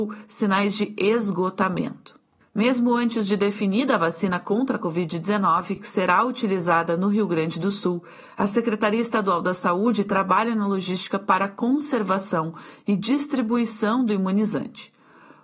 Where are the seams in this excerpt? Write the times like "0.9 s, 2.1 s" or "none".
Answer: none